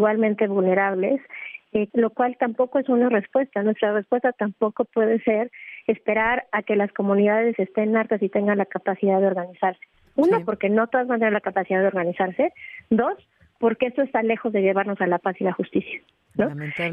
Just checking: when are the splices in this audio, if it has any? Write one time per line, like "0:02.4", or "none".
0:01.9